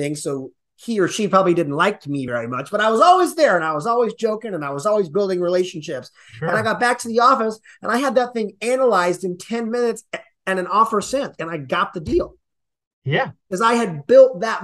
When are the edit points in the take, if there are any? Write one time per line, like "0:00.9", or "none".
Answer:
none